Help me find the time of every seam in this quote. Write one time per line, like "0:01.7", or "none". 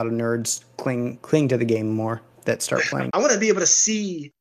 0:03.1